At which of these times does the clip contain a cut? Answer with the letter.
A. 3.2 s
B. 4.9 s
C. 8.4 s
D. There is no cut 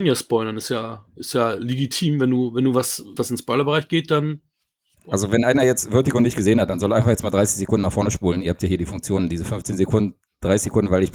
A